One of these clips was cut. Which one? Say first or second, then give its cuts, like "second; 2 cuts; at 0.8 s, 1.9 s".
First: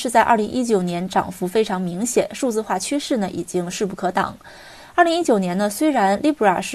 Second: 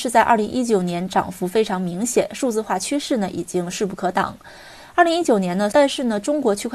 second; 1 cut; at 5.7 s